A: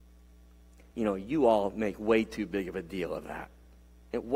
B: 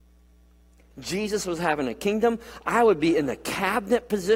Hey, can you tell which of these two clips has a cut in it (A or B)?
B